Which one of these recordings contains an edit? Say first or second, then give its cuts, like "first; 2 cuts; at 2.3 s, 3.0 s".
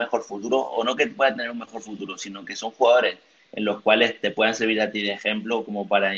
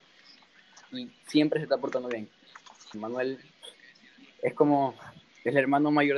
second; 1 cut; at 2.9 s